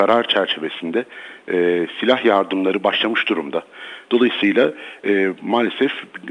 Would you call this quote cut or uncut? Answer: cut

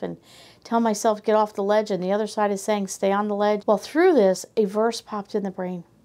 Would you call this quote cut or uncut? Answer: cut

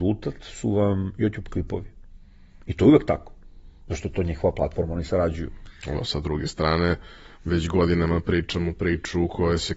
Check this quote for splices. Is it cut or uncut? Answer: uncut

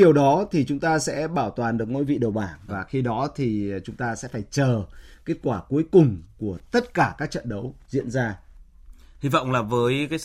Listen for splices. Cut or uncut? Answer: cut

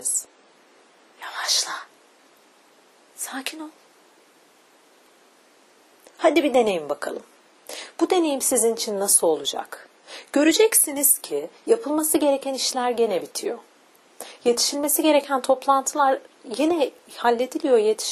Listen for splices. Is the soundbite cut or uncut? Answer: uncut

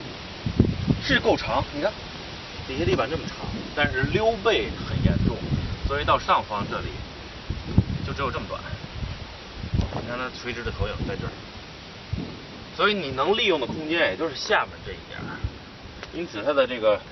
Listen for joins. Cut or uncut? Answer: uncut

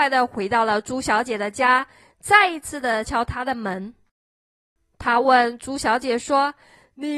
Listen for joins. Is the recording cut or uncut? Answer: cut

